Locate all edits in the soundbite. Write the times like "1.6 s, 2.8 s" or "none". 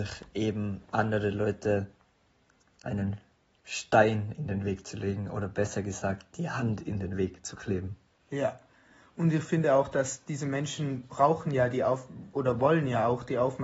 none

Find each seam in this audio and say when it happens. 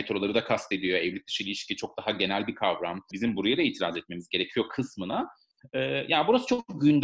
3.1 s

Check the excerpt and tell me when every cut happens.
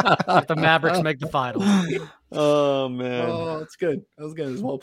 none

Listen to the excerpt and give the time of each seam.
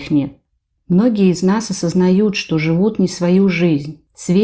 none

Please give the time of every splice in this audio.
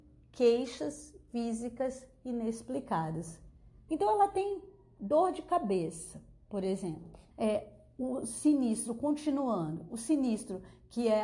3.9 s, 7.3 s

